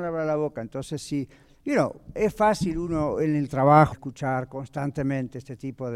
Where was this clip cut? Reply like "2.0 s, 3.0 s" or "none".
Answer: 3.9 s